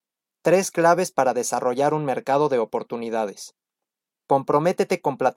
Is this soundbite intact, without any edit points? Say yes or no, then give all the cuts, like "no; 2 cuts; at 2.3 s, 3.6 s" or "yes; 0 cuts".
no; 1 cut; at 4.2 s